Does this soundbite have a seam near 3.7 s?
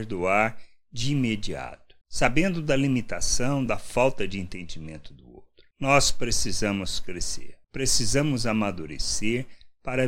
yes; 1 cut; at 3.7 s

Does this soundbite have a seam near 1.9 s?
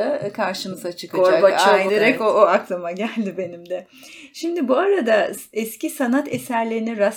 yes; 1 cut; at 1.9 s

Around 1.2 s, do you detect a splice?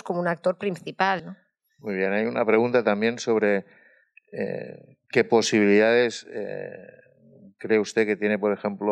yes; 1 cut; at 1.2 s

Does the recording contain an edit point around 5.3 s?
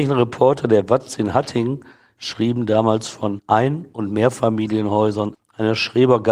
yes; 1 cut; at 5.3 s

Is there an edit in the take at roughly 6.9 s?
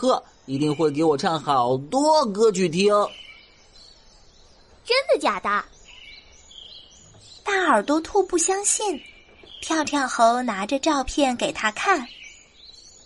no; 0 cuts

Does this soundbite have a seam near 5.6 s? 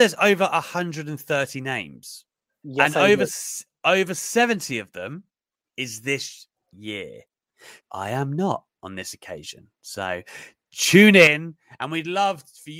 yes; 3 cuts; at 2.6 s, 5.6 s, 7.8 s

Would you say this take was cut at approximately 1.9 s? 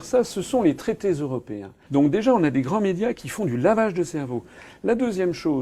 yes; 1 cut; at 1.9 s

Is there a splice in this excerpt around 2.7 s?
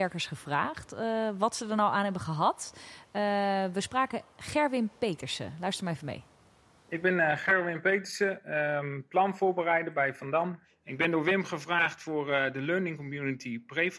no; 0 cuts

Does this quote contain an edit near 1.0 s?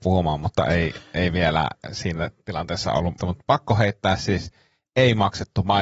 no; 1 cut; at 3.2 s

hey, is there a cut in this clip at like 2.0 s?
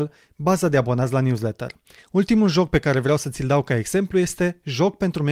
yes; 1 cut; at 2.0 s

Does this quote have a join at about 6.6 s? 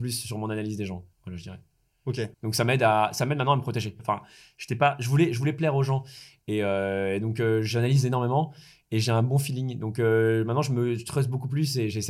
no; 3 cuts; at 1.1 s, 2.3 s, 4.0 s

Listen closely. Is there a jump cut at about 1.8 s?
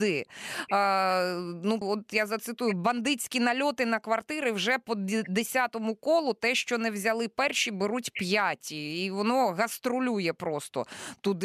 yes; 1 cut; at 1.8 s

